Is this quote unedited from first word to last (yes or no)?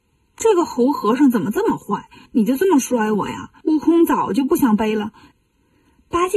no